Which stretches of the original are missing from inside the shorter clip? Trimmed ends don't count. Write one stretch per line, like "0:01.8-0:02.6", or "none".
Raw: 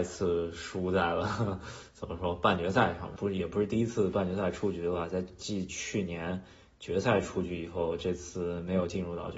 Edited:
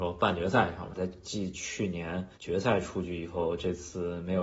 0:03.2-0:05.1
0:06.5-0:06.7

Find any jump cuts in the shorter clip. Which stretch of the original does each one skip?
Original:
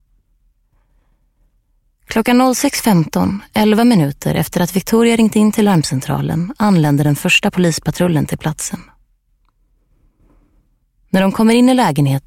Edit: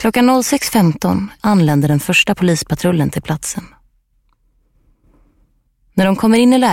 0:03.5-0:06.6

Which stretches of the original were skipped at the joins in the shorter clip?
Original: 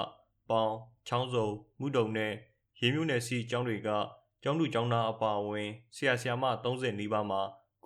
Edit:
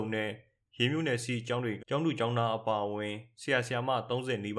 0:03.8-0:04.3

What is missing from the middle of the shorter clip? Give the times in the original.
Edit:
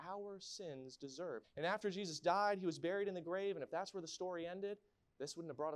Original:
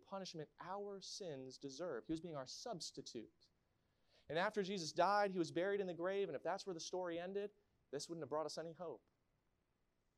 0:02.0-0:04.2

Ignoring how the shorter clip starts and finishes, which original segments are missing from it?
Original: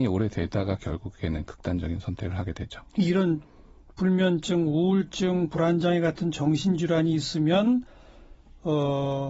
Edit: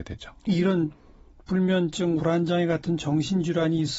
0:04.7-0:05.5

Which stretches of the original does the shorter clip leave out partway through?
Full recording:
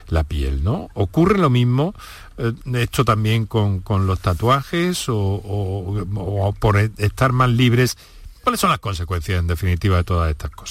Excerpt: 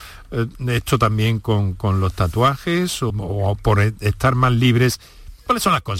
0:05.2-0:06.1

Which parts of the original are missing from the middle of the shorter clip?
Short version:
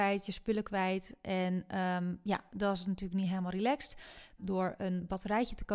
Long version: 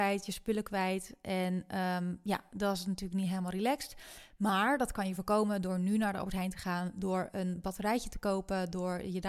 0:04.4-0:06.9

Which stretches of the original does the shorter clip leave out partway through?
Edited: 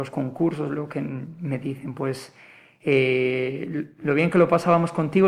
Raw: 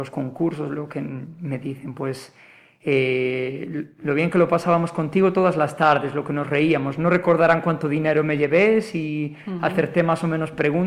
none

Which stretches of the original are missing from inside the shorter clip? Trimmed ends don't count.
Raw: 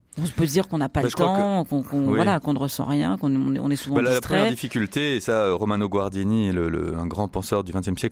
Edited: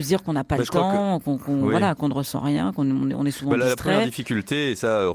none

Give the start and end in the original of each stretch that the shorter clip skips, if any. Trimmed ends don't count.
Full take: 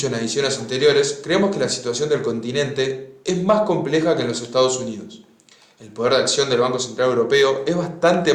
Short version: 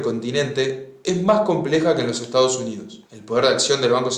0:05.3-0:05.7

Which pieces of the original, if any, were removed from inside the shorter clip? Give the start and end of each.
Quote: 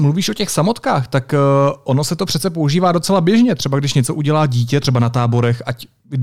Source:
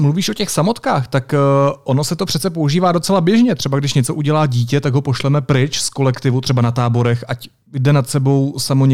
0:04.8-0:06.4

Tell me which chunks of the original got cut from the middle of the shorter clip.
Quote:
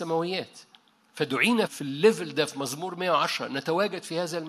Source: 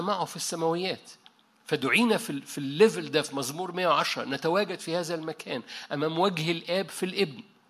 0:02.2-0:02.4

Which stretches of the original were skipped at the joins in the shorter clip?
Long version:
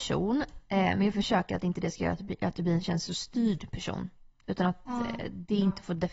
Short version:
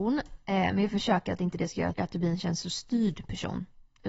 0:02.2-0:02.4

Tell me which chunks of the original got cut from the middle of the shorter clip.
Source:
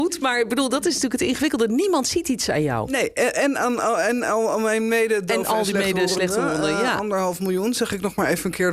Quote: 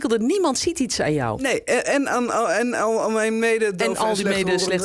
none

